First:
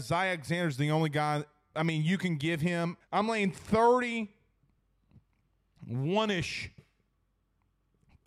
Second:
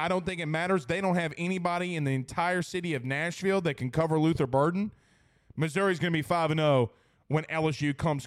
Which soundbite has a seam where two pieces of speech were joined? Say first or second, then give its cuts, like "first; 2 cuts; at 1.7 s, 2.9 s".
first; 1 cut; at 3.0 s